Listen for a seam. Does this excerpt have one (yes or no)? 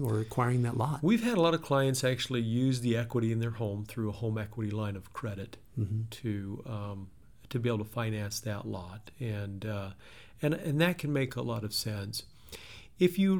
no